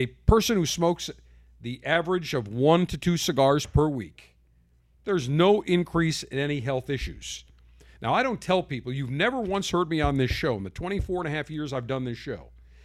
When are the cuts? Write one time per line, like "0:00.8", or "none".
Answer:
none

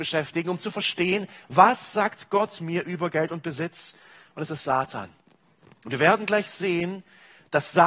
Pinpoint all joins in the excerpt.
none

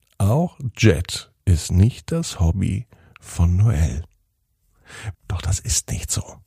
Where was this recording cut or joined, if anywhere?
0:05.1

